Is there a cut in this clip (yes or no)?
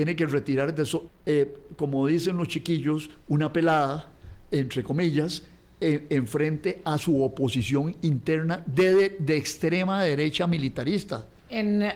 yes